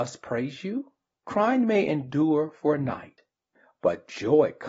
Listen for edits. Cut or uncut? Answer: cut